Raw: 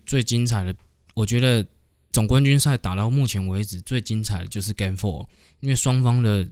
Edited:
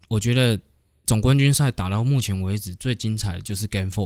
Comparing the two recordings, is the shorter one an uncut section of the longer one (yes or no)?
yes